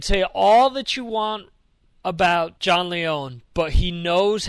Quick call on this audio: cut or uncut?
cut